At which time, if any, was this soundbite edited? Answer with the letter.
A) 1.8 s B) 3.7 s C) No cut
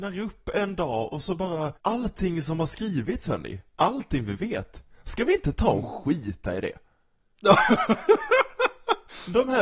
A